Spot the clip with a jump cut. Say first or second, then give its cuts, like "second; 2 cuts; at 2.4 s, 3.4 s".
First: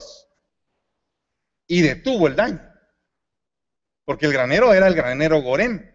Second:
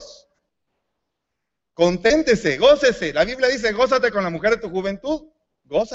first; 1 cut; at 1.6 s